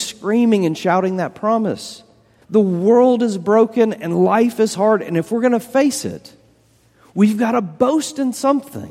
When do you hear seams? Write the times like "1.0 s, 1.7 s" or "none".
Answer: 2.4 s

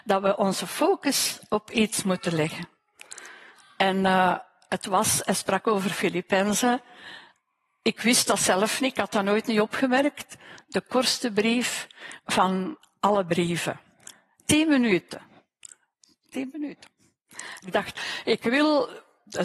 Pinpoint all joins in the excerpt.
17.6 s

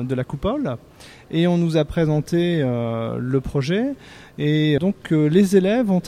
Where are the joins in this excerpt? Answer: 4.8 s

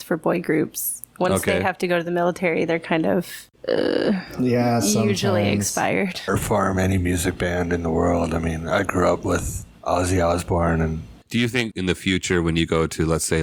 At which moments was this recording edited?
6.3 s, 11.7 s

